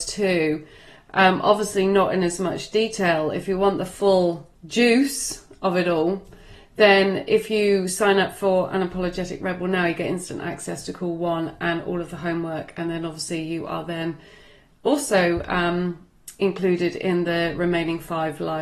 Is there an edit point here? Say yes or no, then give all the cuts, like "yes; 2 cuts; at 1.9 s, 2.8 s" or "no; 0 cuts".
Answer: yes; 1 cut; at 4.6 s